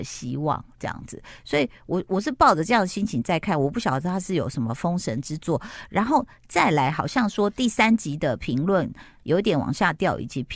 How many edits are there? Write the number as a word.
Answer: zero